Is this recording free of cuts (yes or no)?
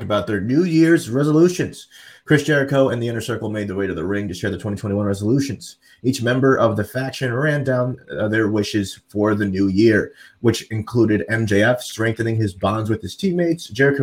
yes